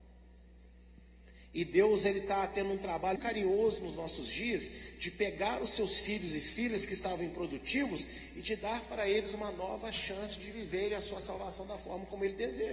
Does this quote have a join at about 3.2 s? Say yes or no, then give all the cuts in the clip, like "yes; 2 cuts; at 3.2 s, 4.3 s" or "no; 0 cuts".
yes; 1 cut; at 3.2 s